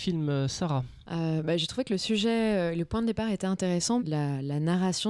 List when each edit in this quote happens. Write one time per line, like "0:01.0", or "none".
0:01.0
0:04.0